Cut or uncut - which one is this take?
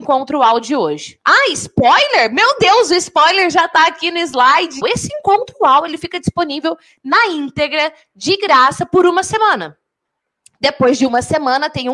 cut